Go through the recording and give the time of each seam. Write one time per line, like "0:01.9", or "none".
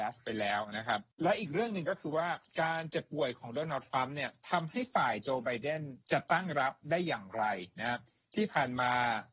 0:01.1
0:06.0